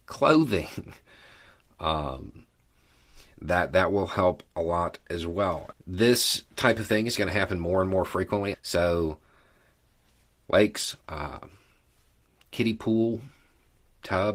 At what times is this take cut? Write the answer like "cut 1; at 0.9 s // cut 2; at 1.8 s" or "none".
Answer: cut 1; at 5.7 s // cut 2; at 8.5 s // cut 3; at 11.0 s

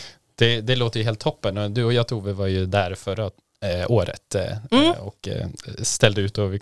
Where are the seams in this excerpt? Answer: none

